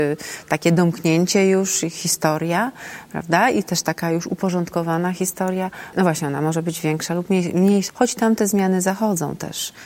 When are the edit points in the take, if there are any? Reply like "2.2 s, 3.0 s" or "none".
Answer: 5.9 s, 7.9 s